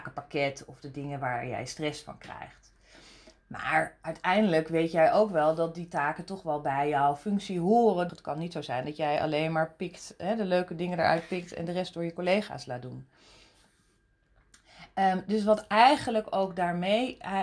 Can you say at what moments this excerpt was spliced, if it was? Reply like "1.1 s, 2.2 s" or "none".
8.1 s